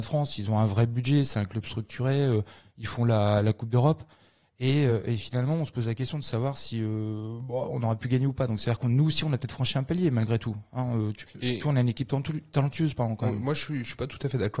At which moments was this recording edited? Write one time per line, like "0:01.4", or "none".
none